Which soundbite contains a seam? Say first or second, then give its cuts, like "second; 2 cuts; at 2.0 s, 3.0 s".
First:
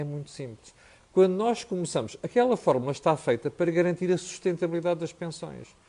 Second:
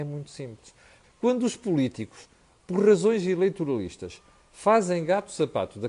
second; 1 cut; at 1.0 s